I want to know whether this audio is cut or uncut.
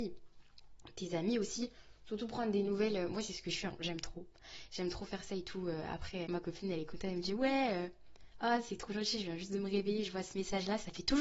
cut